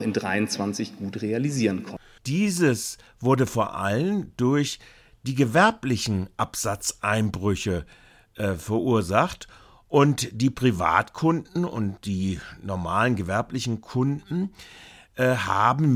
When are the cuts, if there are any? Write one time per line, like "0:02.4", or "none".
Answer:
0:02.2